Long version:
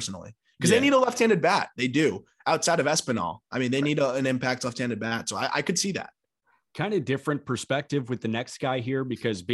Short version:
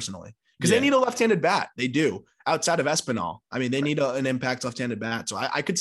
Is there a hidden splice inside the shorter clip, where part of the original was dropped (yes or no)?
no